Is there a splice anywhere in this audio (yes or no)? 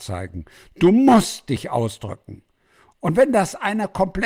no